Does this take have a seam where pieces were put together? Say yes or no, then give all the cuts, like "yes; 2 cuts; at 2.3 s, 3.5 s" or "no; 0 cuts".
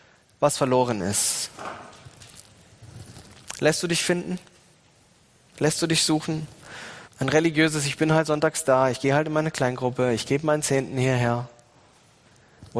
yes; 1 cut; at 7.0 s